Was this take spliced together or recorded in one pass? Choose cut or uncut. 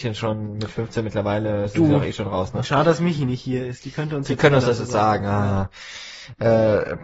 uncut